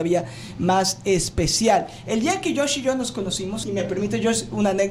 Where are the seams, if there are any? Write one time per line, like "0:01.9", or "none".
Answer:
0:03.6